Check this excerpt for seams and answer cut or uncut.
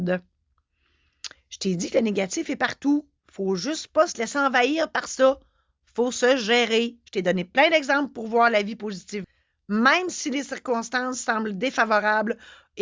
cut